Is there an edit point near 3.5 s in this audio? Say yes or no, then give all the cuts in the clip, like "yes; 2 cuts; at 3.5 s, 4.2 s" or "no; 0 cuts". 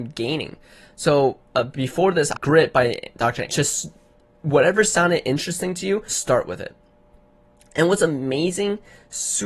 yes; 3 cuts; at 2.3 s, 3.5 s, 6.1 s